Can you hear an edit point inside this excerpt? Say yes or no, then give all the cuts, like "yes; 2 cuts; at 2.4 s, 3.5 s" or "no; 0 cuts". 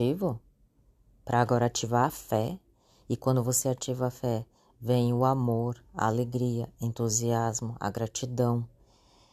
no; 0 cuts